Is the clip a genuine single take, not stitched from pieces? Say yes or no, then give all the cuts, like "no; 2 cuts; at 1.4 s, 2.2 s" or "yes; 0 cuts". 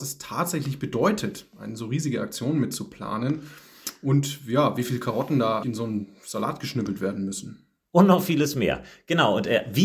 no; 1 cut; at 5.6 s